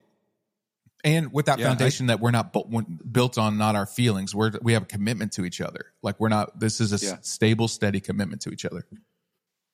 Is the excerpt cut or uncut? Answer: cut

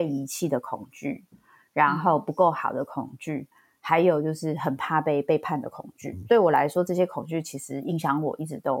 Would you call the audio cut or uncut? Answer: uncut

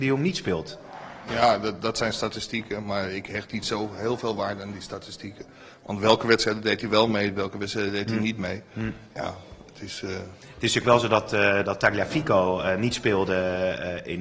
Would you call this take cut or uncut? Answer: uncut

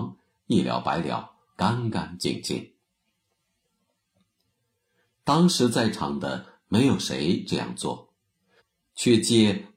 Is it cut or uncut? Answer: cut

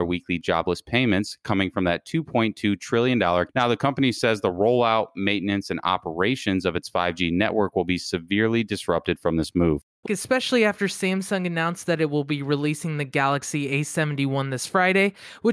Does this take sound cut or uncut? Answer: cut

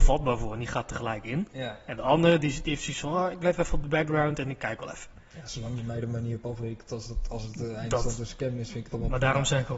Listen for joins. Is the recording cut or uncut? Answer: uncut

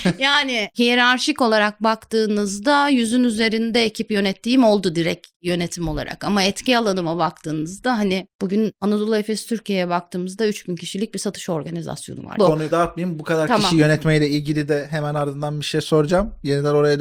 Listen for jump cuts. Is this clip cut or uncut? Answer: cut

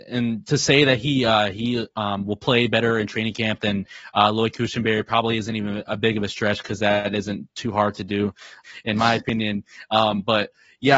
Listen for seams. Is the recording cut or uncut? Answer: cut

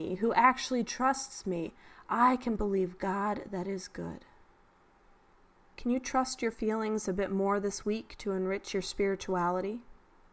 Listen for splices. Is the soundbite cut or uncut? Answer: uncut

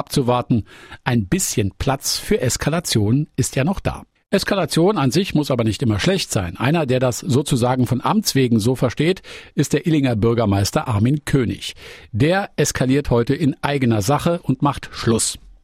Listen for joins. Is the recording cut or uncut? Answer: uncut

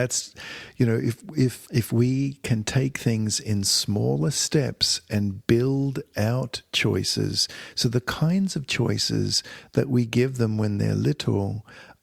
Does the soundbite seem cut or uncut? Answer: cut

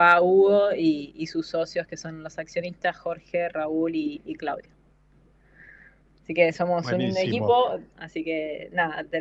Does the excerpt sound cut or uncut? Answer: cut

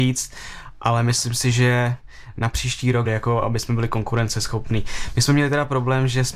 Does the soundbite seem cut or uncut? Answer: cut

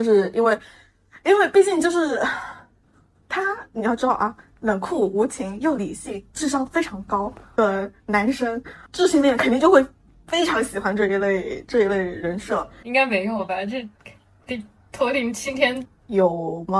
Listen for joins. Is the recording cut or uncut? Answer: cut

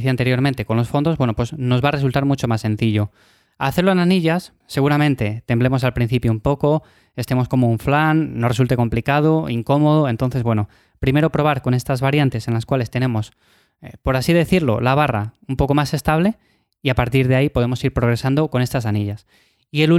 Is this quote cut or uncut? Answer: uncut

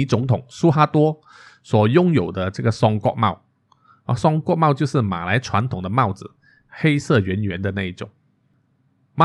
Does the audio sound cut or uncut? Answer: uncut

